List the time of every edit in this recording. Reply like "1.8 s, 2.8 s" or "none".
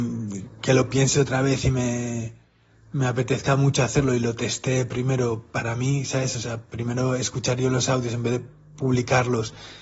none

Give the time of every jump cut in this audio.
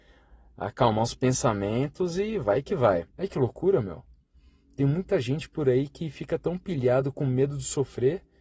3.1 s

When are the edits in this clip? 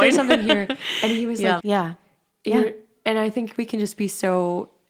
1.6 s

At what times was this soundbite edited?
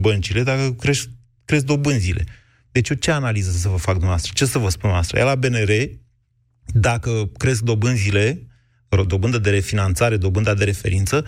none

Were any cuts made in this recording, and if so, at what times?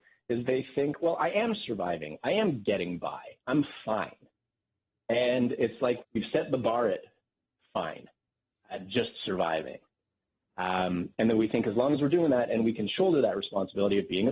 6.0 s

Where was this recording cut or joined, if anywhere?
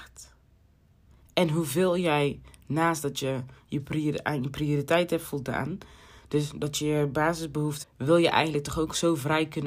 7.8 s

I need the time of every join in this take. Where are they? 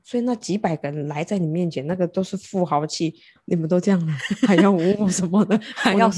3.4 s

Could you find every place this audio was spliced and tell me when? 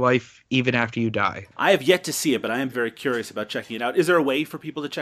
1.5 s, 2.7 s

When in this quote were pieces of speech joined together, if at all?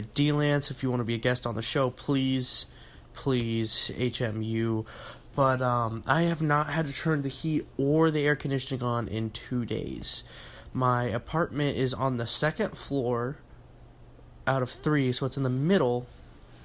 none

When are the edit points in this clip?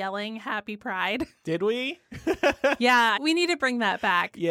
3.2 s

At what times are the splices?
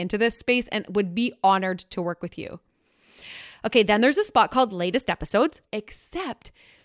5.6 s

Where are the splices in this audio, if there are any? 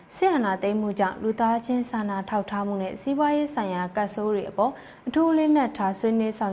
none

